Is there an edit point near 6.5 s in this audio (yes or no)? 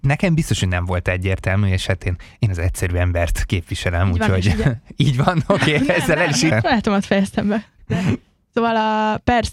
yes